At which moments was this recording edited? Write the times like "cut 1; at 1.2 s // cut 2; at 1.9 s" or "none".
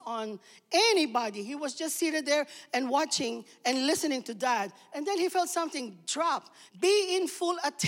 cut 1; at 6.7 s